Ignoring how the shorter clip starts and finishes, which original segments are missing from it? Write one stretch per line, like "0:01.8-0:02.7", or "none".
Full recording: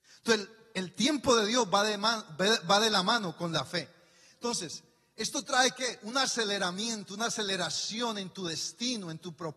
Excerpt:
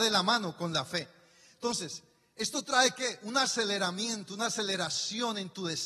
none